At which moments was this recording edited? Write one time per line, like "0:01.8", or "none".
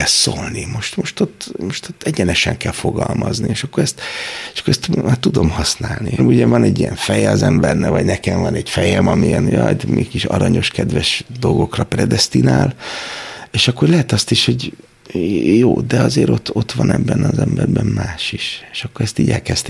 0:06.2